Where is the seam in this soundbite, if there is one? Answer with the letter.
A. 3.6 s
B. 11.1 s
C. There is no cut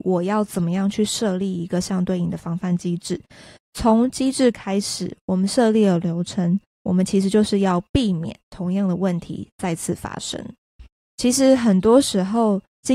B